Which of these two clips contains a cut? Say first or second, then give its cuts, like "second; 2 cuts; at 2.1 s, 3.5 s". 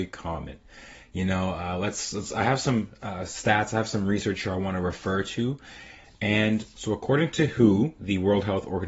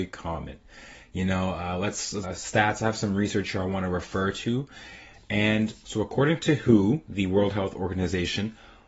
second; 1 cut; at 2.2 s